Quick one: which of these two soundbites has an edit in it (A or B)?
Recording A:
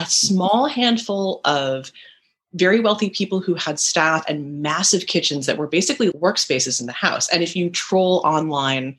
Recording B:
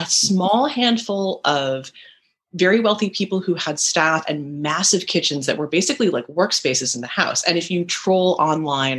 A